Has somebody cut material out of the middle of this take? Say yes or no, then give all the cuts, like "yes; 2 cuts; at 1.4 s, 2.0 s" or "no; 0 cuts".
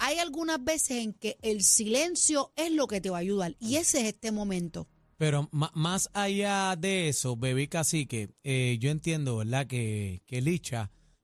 no; 0 cuts